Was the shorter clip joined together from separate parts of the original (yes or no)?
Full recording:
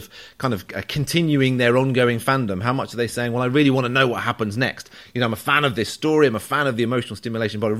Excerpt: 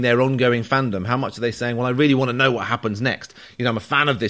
no